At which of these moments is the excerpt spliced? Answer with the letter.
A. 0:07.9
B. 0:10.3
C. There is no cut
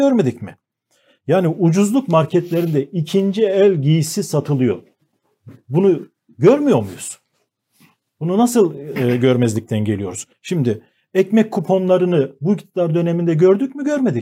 B